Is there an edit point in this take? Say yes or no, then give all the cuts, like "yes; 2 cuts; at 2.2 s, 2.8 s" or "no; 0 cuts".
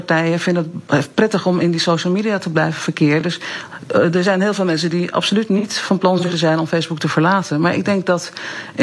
no; 0 cuts